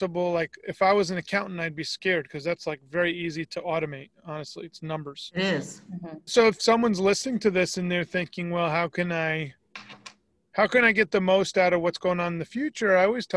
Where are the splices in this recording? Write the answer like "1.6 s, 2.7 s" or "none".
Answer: 6.3 s